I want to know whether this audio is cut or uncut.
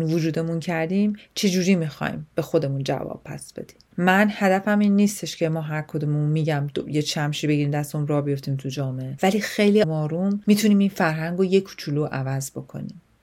cut